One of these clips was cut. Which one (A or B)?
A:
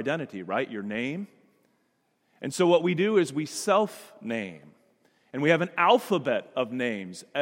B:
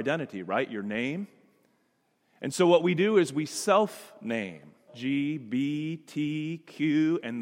B